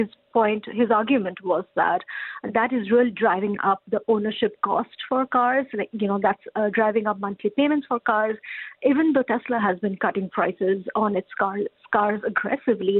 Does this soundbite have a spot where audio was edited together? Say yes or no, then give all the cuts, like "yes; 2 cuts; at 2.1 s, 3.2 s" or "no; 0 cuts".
no; 0 cuts